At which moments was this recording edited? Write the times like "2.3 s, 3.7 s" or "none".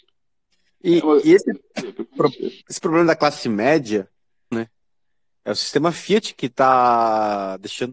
2.6 s, 4.5 s